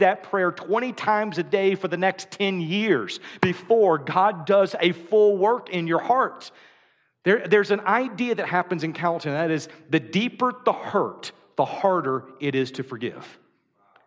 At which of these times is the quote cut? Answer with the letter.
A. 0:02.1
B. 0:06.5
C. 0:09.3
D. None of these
D